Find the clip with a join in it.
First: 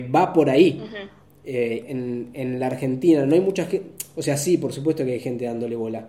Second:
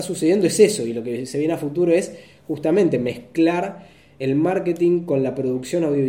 first; 1 cut; at 1.8 s

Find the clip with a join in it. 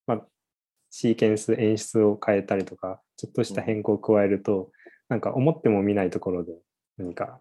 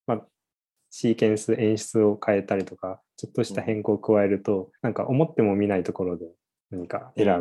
second; 1 cut; at 4.8 s

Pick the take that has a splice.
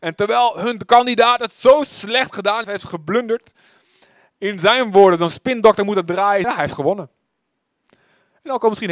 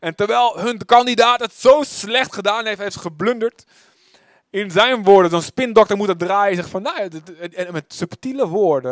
first; 2 cuts; at 2.6 s, 6.4 s

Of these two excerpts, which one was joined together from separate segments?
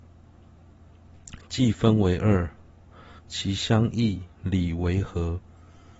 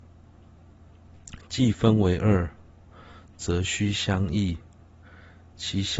first; 2 cuts; at 3.2 s, 4.3 s

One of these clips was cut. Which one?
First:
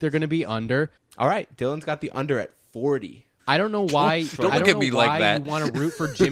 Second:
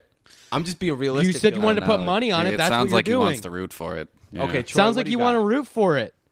first; 2 cuts; at 1.0 s, 3.4 s

